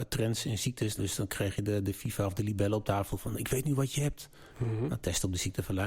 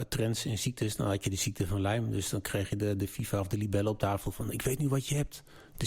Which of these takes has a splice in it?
first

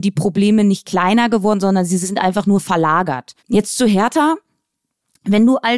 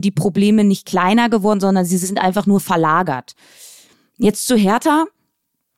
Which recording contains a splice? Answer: first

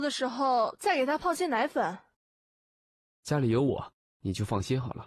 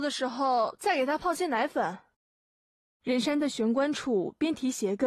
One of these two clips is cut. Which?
first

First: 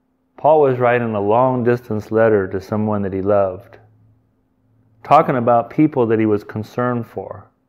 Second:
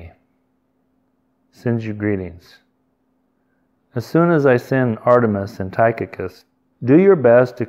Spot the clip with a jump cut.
second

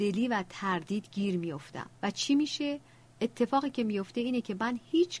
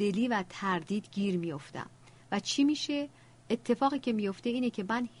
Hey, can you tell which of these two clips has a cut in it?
first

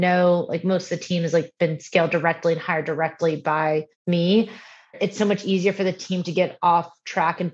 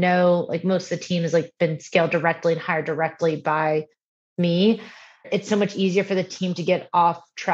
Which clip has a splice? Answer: first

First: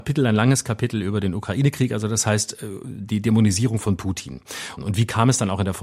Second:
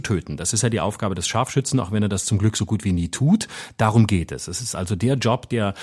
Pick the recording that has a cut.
first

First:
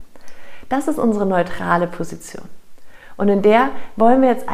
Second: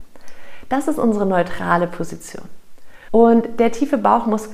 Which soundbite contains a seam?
second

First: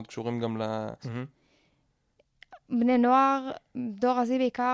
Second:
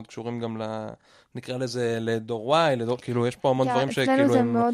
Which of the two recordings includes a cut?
first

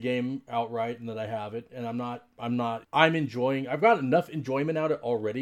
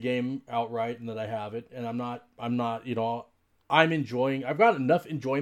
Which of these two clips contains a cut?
first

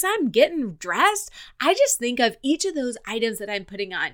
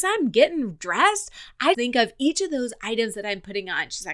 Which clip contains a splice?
second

